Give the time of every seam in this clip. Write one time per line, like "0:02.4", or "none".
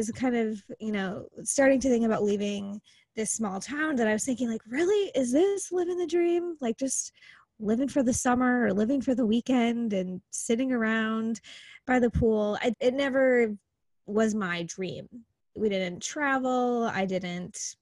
0:12.7
0:15.6